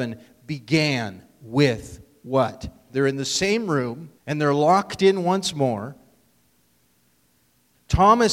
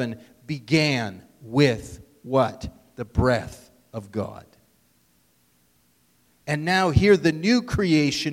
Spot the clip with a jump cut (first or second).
first